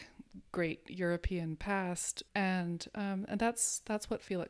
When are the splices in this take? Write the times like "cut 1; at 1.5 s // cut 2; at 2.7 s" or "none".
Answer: cut 1; at 2.3 s